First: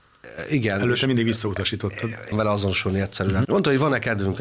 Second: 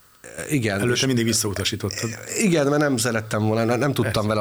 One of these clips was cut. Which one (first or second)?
first